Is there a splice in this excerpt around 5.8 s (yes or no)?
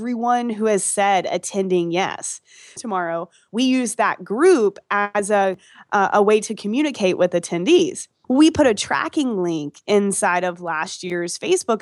no